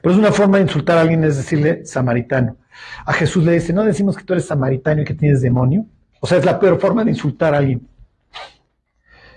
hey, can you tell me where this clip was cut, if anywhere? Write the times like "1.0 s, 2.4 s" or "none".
none